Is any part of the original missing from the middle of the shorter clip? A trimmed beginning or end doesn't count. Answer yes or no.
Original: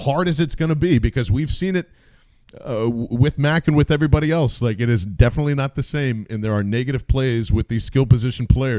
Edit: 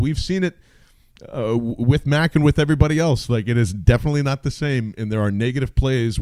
no